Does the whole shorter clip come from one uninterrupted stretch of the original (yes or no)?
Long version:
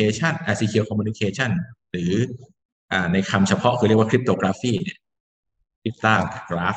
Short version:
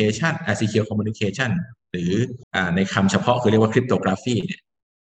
no